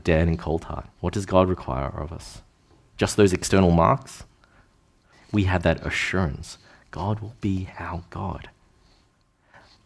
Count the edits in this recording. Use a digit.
2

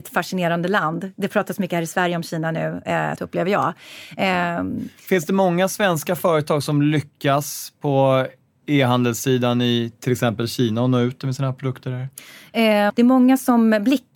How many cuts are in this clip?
2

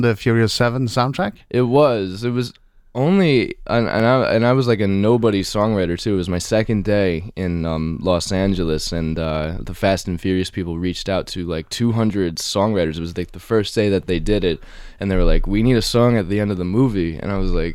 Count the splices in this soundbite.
0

